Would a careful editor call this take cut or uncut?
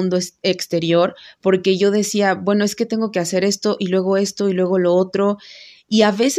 uncut